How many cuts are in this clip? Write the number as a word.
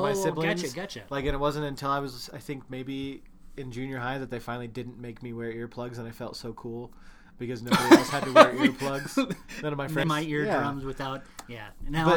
one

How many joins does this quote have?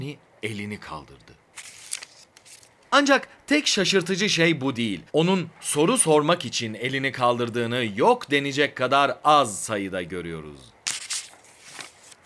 two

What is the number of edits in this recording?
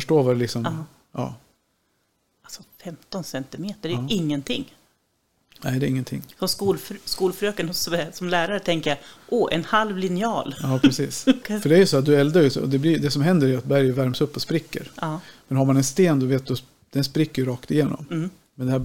one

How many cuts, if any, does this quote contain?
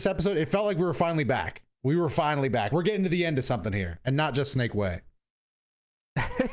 zero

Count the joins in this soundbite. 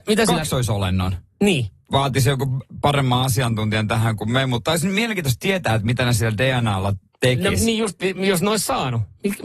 one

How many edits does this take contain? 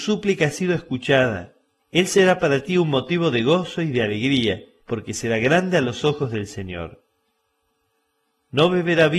two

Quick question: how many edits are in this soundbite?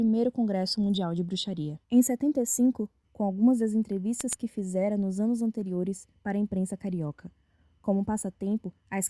two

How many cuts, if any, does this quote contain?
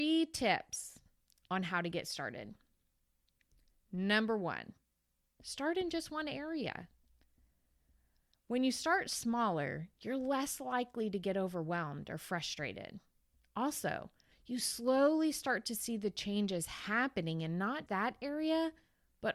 two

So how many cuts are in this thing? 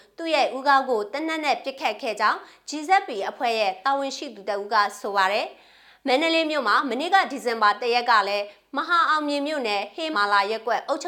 one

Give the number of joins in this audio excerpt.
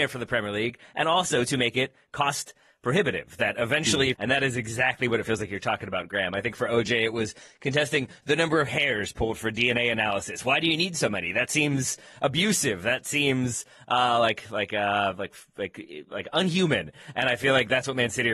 one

